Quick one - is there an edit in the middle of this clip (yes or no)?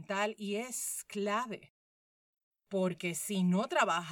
no